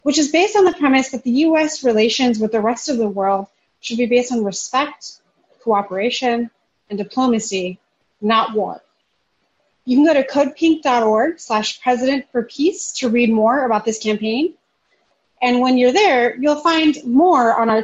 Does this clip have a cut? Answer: no; 0 cuts

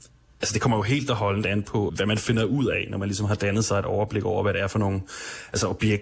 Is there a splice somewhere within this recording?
yes; 1 cut; at 1.9 s

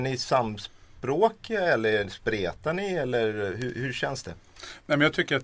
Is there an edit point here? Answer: no; 0 cuts

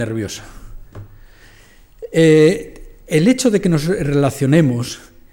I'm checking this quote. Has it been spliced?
no; 0 cuts

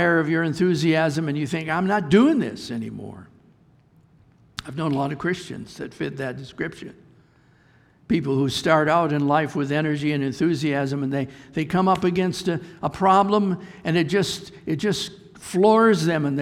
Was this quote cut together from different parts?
no; 0 cuts

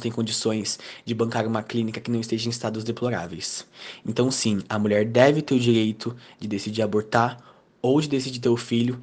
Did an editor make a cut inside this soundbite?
no; 0 cuts

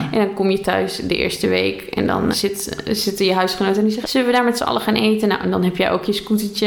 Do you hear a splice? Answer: yes; 2 cuts; at 2.3 s, 4.0 s

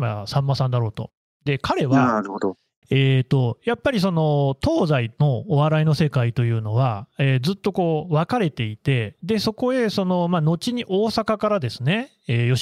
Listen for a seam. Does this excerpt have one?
yes; 1 cut; at 2.8 s

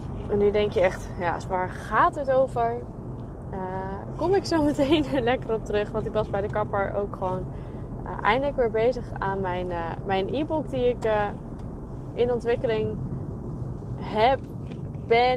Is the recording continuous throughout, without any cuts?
no; 1 cut; at 1.4 s

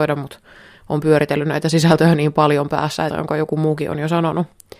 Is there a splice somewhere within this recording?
yes; 1 cut; at 3.1 s

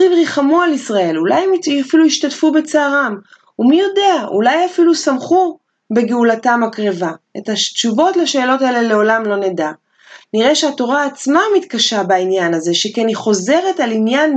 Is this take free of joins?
yes; 0 cuts

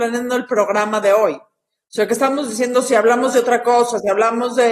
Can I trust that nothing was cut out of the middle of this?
yes; 0 cuts

